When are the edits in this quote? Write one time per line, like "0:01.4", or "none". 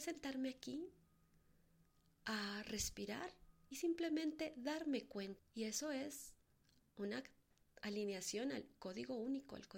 0:05.4